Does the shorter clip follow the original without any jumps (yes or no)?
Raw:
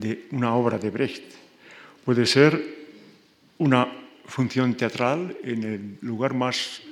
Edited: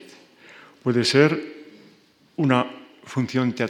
yes